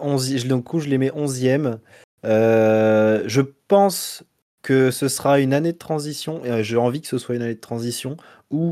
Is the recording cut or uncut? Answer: uncut